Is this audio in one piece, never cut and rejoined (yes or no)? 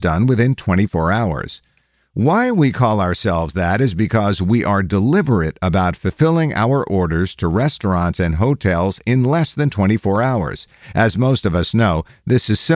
yes